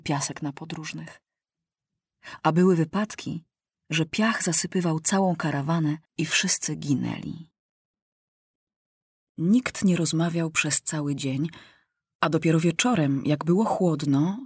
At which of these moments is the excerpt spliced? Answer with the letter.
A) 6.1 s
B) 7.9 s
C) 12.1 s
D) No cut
A